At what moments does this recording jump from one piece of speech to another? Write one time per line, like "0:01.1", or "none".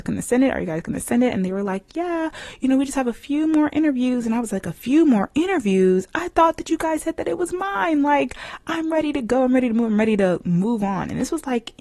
none